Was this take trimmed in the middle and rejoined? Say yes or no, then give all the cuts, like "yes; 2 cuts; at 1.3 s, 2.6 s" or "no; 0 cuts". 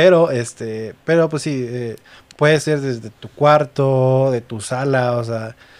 no; 0 cuts